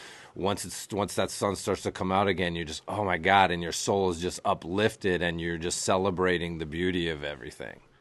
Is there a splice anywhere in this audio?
no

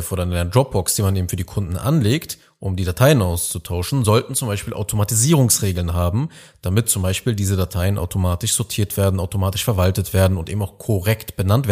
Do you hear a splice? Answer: no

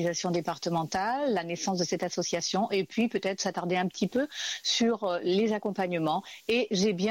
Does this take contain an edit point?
no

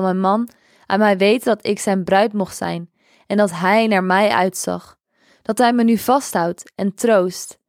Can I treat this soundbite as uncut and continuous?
yes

